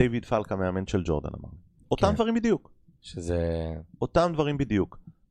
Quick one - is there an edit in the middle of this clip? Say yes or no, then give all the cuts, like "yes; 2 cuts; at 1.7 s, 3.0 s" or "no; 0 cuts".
no; 0 cuts